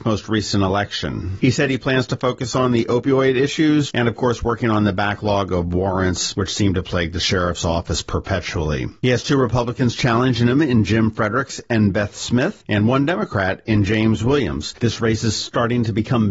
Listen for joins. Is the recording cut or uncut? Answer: cut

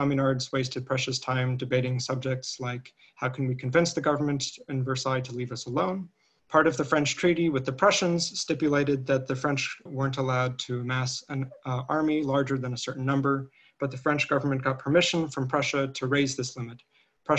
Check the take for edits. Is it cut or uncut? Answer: cut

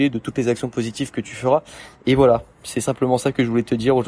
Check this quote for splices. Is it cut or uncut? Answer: uncut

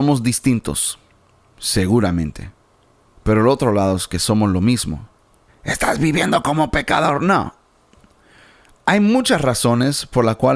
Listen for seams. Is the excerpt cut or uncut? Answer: cut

